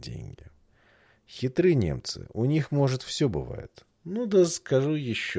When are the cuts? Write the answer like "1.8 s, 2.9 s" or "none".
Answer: none

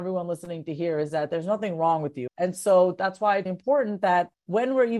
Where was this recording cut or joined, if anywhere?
2.3 s, 3.5 s

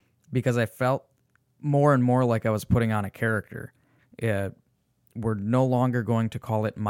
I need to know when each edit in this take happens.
4.0 s

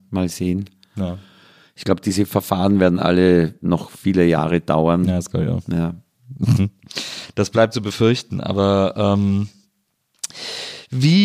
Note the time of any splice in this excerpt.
none

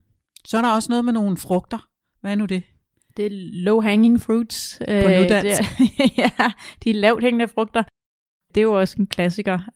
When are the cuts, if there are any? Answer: none

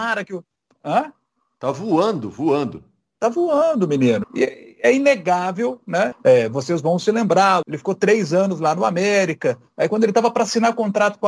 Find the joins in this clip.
4.2 s, 6.1 s, 7.6 s

